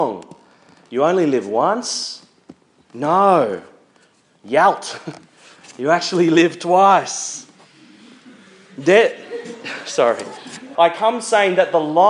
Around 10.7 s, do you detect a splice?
yes; 1 cut; at 10.7 s

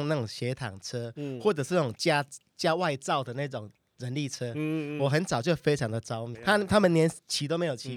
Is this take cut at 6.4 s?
yes; 1 cut; at 6.4 s

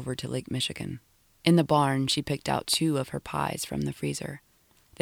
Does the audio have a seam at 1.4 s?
yes; 1 cut; at 1.4 s

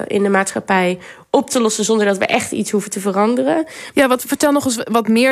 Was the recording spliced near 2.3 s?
no; 1 cut; at 3.9 s

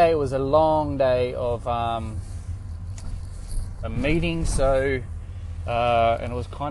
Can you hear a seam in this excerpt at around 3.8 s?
yes; 1 cut; at 3.8 s

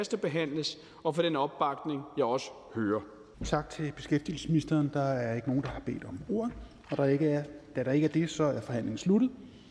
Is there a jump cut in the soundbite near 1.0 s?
no; 1 cut; at 3.3 s

